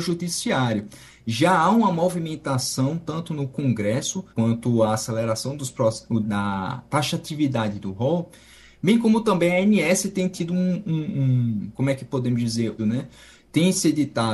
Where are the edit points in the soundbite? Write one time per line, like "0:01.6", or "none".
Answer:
0:04.3
0:06.2
0:12.8